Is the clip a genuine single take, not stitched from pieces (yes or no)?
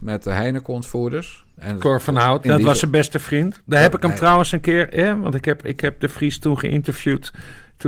no